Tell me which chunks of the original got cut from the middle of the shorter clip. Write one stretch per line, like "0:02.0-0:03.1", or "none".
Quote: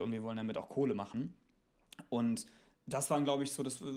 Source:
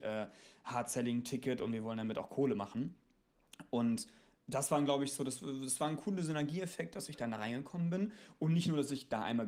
none